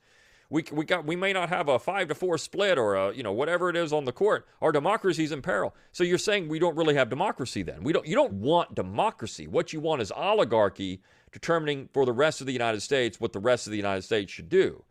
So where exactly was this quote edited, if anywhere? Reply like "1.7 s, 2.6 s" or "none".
8.3 s